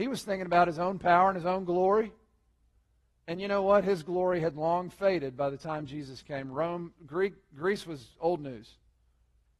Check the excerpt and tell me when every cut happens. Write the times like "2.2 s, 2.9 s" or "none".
7.0 s